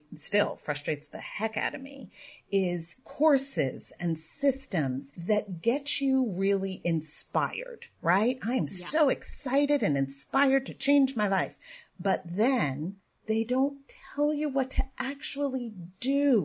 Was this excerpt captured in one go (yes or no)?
yes